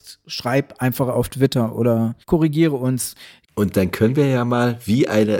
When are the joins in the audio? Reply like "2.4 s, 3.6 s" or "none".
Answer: 2.2 s, 3.4 s